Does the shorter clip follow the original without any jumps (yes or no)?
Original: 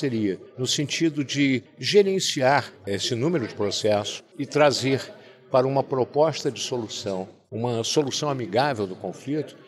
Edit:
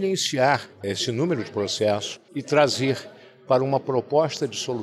yes